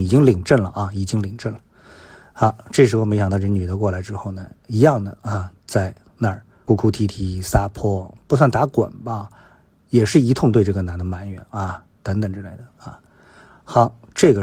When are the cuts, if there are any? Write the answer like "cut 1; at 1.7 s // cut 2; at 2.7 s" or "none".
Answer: cut 1; at 6.7 s // cut 2; at 12.0 s